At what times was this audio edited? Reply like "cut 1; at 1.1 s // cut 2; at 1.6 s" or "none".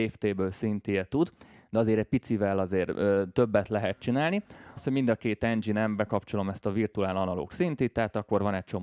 cut 1; at 4.8 s